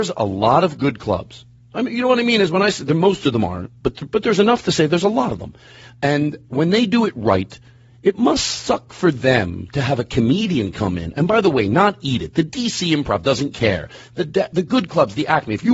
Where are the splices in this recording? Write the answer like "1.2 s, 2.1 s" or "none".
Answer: none